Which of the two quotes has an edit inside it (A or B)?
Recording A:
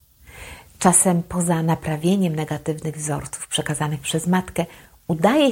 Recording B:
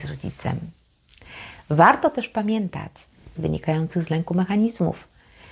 B